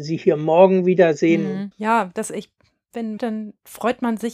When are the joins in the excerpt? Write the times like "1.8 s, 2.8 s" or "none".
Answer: 1.7 s, 3.2 s